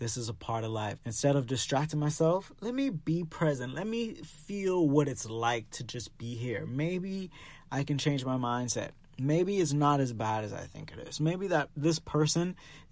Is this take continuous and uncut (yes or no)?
no